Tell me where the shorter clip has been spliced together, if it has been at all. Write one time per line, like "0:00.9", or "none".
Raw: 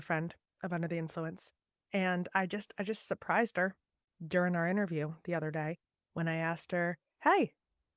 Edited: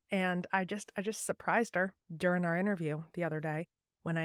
0:02.0